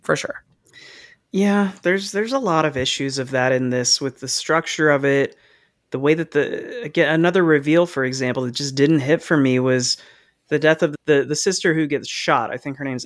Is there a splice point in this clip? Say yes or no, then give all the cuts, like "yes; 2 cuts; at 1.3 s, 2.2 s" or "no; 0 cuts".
no; 0 cuts